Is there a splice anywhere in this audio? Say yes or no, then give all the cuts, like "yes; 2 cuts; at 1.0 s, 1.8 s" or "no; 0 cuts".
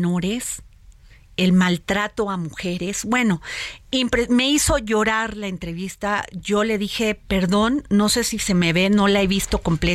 no; 0 cuts